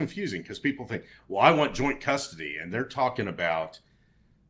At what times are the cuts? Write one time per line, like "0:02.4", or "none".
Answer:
none